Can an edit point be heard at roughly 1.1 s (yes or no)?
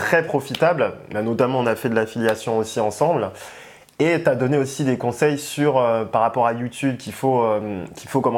no